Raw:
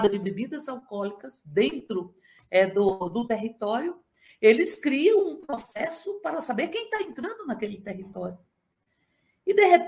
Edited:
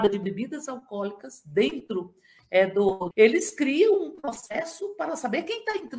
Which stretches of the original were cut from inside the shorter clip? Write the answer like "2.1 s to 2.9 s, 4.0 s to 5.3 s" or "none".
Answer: 3.1 s to 4.4 s